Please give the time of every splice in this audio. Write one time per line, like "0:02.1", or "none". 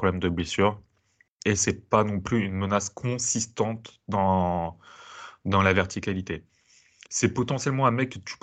none

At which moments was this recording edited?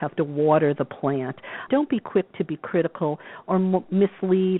0:01.7

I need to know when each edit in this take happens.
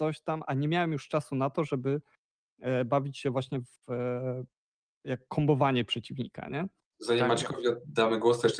none

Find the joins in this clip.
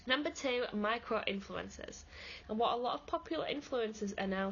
0:02.4

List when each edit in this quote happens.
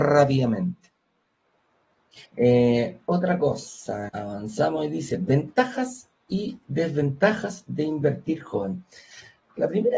0:02.2
0:04.1

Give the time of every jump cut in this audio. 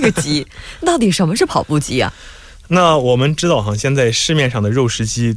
none

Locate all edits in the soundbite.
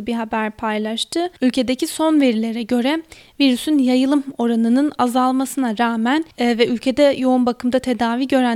0:01.4
0:06.3

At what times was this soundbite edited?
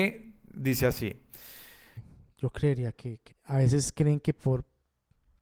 0:02.0
0:03.3

